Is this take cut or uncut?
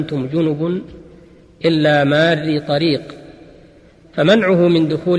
uncut